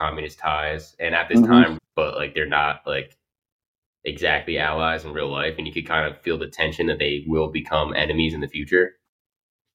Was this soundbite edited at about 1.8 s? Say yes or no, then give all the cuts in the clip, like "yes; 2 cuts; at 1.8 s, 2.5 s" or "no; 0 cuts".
yes; 1 cut; at 1.8 s